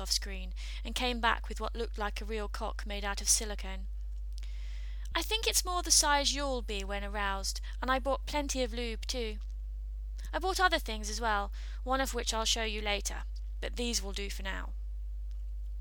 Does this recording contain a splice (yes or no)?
no